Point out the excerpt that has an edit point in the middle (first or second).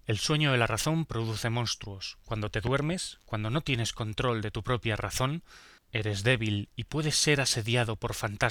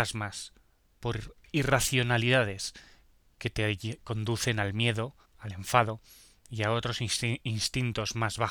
second